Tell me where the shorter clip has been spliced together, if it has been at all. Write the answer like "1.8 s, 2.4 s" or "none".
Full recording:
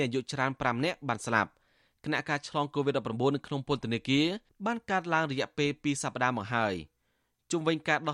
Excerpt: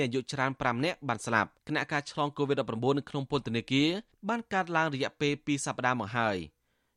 1.6 s

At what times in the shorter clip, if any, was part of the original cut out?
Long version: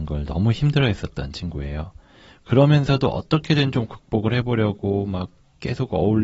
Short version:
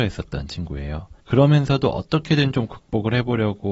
1.2 s

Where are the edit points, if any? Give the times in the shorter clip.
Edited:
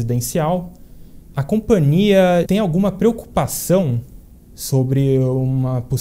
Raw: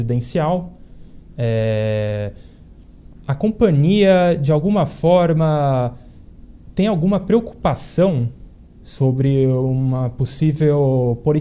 1.3 s, 2.4 s

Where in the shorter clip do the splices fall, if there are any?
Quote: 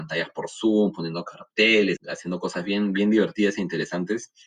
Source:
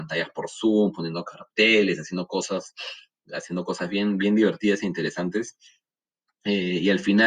2.0 s

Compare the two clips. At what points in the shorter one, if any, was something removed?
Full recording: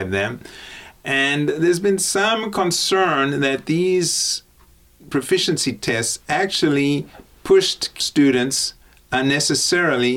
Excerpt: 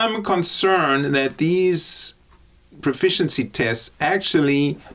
none

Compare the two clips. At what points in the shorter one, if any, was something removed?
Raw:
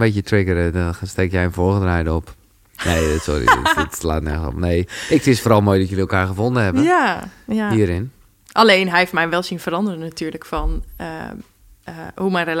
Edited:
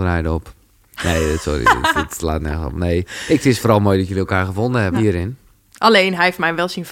4.9 s

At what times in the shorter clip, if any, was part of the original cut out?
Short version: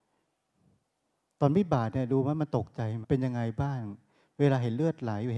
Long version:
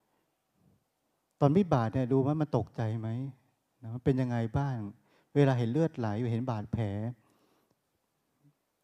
3.0 s

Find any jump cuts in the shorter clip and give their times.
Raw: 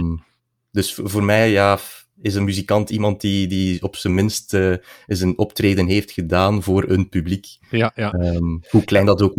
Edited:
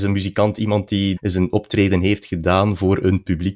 1.2 s

